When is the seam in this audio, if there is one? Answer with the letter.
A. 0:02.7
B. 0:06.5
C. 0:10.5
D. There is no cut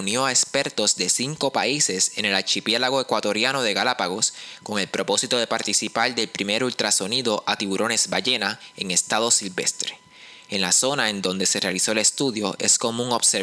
C